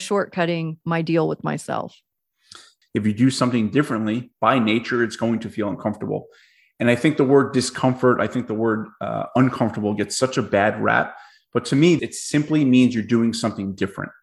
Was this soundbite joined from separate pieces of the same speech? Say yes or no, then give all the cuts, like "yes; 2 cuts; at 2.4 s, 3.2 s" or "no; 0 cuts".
yes; 2 cuts; at 2.8 s, 12.0 s